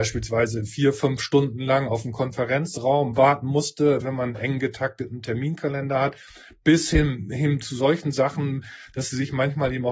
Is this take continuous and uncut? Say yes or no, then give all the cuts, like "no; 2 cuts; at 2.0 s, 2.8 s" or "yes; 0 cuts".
no; 1 cut; at 4.0 s